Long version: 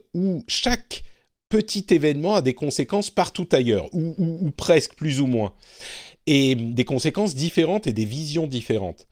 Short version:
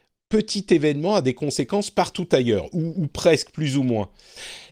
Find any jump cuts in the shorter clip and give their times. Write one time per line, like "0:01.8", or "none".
0:02.9